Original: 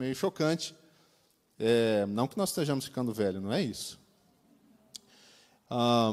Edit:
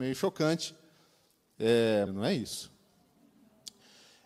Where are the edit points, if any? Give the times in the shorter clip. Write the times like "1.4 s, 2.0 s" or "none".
2.1 s